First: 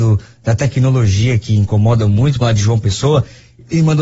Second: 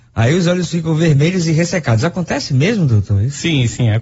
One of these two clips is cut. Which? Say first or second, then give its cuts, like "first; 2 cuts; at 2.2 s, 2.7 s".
first; 1 cut; at 2.4 s